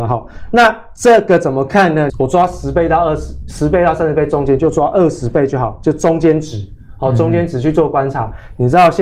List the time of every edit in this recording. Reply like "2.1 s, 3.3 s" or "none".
2.1 s